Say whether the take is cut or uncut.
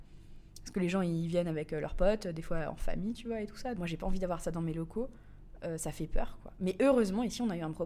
cut